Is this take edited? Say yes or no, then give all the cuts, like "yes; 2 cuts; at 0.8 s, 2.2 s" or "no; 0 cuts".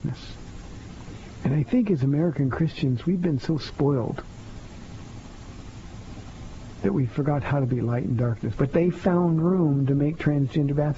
yes; 1 cut; at 8.5 s